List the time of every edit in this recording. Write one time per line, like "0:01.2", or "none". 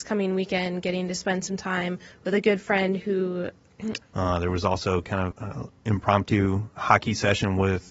0:04.0
0:05.3